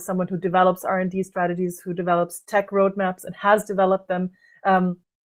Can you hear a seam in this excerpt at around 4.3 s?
no; 0 cuts

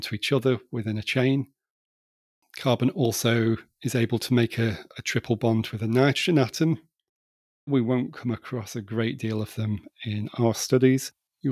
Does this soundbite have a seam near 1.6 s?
no; 1 cut; at 7.7 s

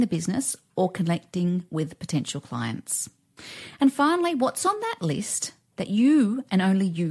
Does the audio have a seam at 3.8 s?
no; 0 cuts

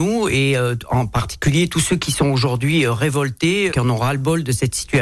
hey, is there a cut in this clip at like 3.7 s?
yes; 1 cut; at 3.7 s

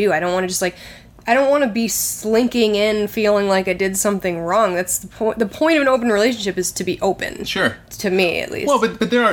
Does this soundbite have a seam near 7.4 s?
no; 0 cuts

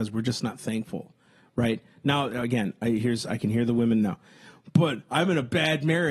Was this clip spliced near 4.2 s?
no; 0 cuts

